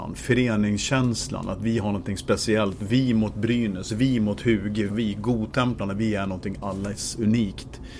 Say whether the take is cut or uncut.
cut